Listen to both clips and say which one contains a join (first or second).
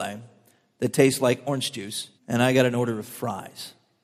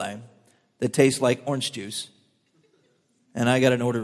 first